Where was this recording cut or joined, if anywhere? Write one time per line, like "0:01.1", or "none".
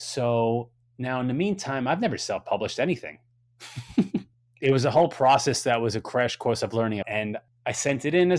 0:07.0